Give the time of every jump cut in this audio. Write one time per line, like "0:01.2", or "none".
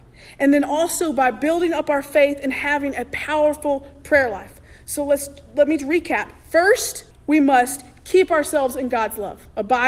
0:05.8
0:07.1

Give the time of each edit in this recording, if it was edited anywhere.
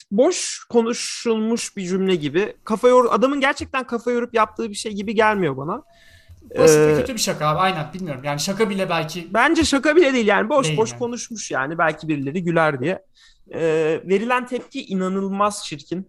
none

